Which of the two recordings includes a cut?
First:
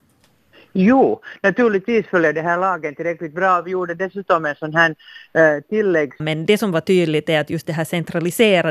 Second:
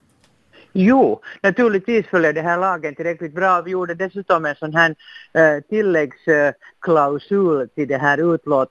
first; 1 cut; at 6.2 s

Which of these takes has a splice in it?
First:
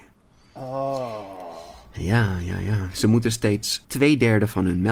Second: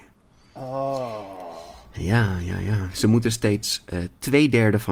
first; 1 cut; at 3.8 s

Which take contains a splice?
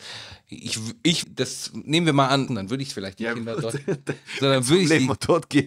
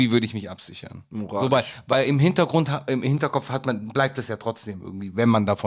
first; 2 cuts; at 1.2 s, 2.5 s

